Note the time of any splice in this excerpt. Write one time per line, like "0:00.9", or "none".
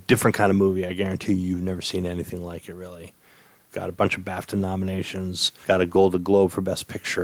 0:03.7
0:05.6